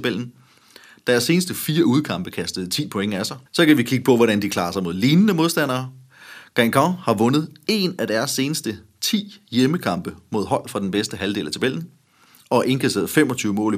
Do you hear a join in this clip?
yes; 1 cut; at 3.5 s

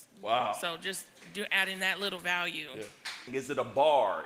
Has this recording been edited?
yes; 1 cut; at 3.3 s

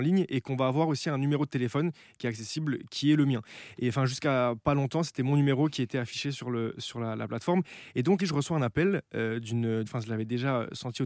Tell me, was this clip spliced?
yes; 2 cuts; at 8.2 s, 9.9 s

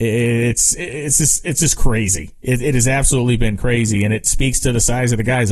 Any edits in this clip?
no; 0 cuts

